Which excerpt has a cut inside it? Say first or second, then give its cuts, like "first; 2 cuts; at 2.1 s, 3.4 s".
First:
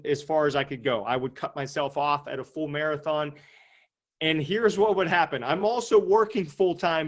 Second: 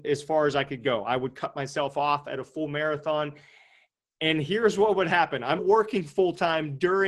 second; 1 cut; at 5.6 s